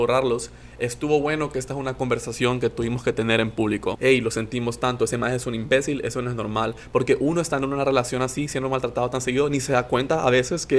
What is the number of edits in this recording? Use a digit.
1